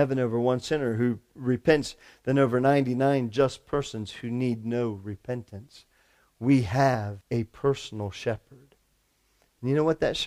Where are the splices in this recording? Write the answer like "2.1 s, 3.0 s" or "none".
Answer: 7.2 s